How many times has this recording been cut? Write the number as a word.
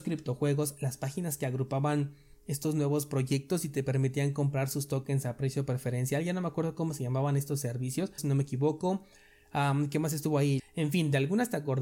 two